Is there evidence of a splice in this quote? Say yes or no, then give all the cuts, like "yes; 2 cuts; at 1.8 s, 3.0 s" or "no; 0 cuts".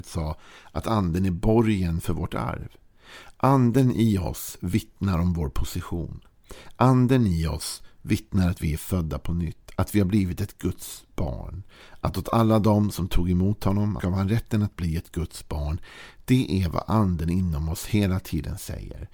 yes; 1 cut; at 14.0 s